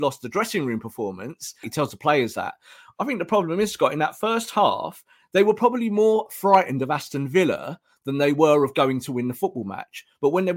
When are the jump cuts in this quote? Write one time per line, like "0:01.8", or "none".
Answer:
0:01.6